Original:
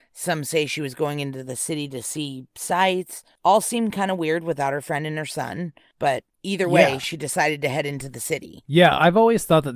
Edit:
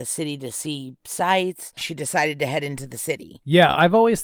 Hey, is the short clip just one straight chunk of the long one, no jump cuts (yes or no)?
no